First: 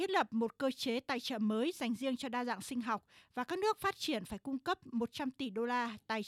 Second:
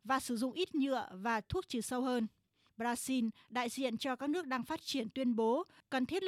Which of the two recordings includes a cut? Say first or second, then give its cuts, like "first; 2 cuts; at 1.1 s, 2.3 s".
second; 1 cut; at 2.7 s